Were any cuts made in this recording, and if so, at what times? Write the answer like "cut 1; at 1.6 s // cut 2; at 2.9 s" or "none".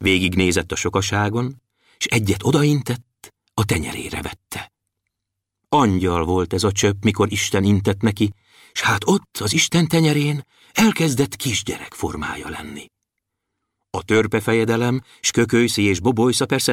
none